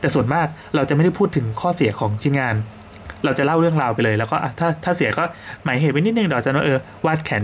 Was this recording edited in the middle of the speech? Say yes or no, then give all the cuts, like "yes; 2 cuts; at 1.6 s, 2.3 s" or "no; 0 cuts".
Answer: no; 0 cuts